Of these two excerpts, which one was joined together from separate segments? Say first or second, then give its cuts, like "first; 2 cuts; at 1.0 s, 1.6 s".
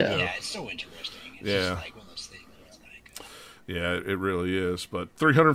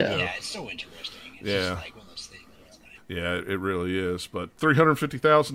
second; 1 cut; at 2.9 s